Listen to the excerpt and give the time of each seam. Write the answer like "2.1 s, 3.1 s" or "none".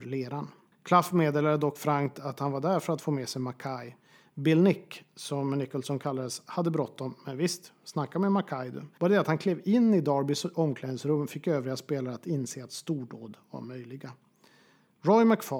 8.9 s